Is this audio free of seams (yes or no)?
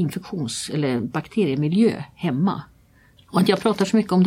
no